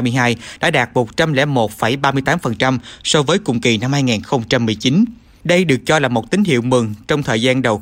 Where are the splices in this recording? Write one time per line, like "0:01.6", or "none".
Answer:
none

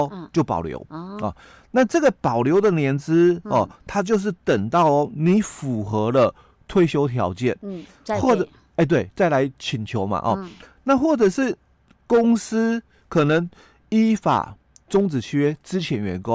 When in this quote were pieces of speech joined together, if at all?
none

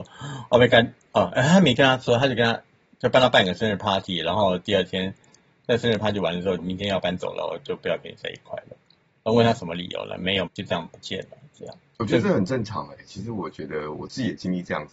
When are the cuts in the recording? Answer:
0:06.6
0:10.5

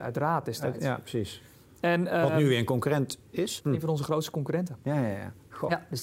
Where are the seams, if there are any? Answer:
0:03.6

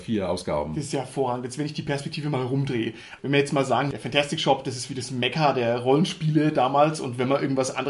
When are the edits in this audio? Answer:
none

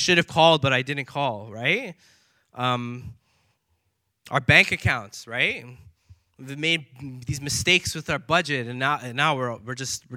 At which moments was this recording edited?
none

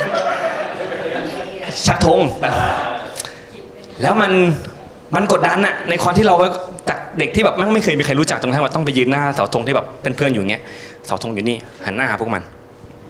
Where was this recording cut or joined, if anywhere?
0:02.4

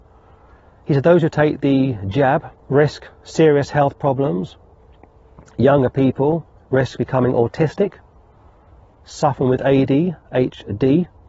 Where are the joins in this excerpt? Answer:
0:02.6

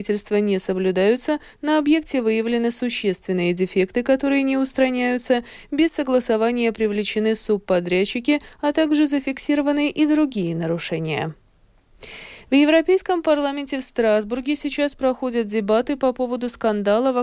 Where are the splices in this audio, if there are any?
none

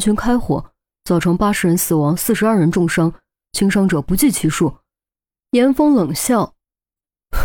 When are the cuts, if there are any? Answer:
0:05.4

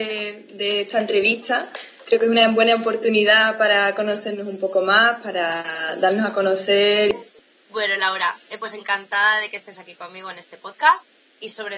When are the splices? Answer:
none

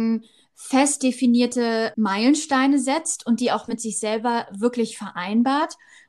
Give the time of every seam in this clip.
0:01.9

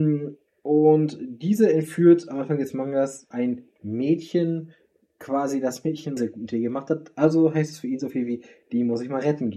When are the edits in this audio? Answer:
0:03.3
0:06.2

